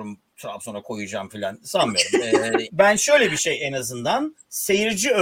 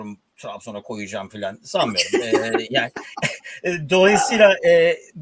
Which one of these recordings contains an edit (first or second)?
first